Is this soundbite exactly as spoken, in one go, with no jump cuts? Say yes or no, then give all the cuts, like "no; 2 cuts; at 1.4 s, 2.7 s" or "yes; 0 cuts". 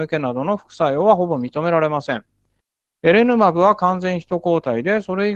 yes; 0 cuts